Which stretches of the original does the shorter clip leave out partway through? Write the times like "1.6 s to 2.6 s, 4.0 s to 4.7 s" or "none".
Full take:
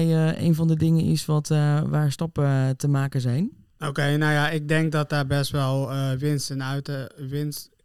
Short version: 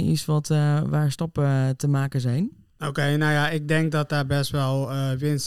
none